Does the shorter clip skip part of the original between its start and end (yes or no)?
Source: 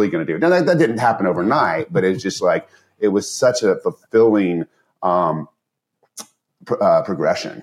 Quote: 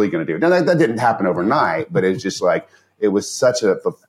no